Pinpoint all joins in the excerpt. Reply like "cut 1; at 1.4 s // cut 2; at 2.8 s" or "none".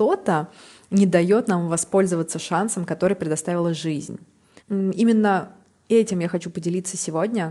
cut 1; at 4.6 s